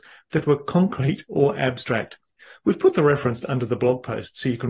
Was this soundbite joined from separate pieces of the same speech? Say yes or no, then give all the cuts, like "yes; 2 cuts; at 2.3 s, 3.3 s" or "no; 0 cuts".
no; 0 cuts